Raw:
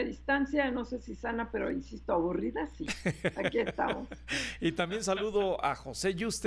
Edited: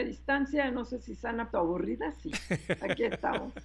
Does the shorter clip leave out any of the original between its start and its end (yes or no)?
yes